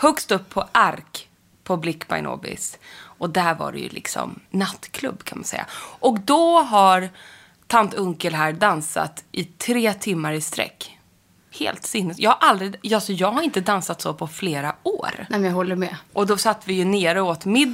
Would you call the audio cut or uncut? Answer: cut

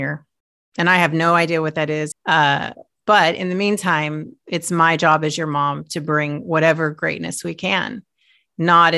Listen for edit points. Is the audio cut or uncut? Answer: cut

